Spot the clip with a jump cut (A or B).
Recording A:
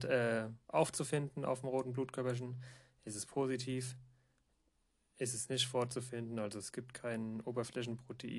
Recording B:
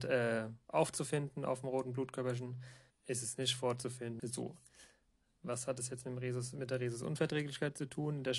B